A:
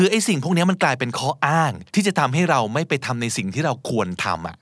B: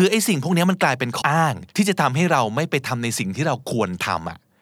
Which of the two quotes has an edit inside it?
B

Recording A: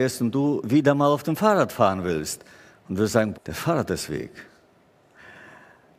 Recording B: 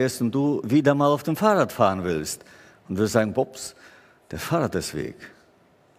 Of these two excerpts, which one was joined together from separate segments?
A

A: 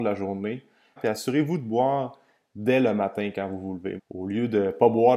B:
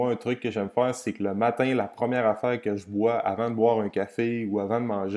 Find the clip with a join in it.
A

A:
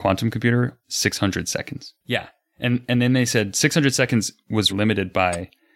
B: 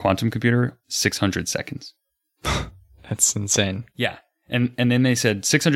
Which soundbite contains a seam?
A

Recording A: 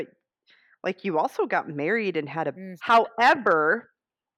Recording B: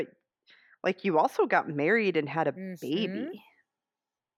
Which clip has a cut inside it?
A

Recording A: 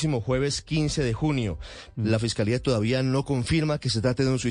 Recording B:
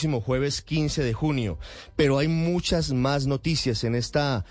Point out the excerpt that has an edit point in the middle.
A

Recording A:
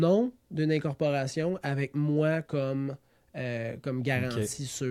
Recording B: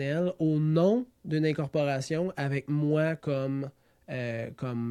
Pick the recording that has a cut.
A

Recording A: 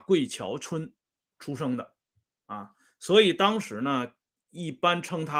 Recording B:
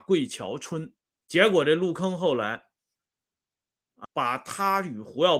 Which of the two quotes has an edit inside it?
B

